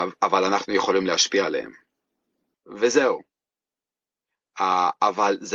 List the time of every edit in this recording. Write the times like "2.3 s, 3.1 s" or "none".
2.5 s